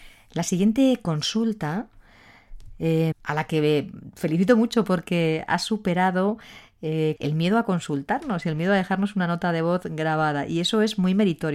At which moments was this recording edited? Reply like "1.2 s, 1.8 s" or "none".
3.1 s, 7.2 s